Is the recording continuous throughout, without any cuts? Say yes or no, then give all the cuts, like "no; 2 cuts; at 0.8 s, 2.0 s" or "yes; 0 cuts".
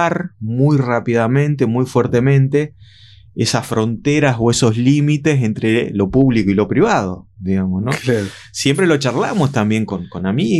yes; 0 cuts